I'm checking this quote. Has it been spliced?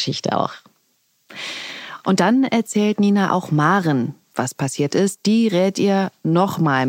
no; 0 cuts

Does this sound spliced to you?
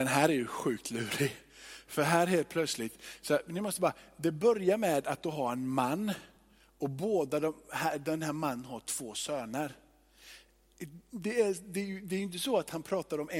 no; 0 cuts

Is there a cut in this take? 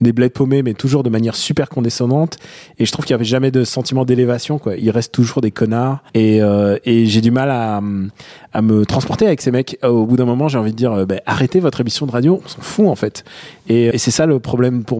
yes; 2 cuts; at 6.1 s, 13.9 s

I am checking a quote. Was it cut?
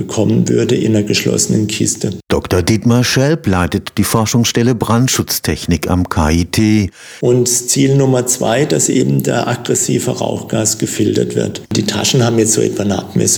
yes; 2 cuts; at 7.2 s, 11.7 s

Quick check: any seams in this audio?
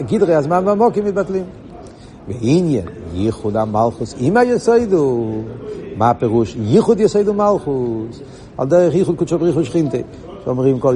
yes; 1 cut; at 8.5 s

